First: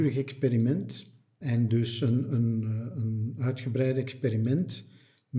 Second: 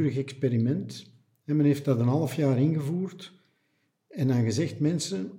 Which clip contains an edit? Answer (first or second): first